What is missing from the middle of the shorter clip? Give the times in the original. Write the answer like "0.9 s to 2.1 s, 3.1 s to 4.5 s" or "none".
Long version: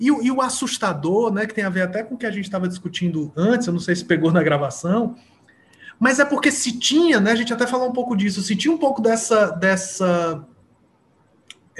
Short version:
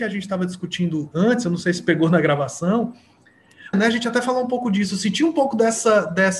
6.0 s to 7.2 s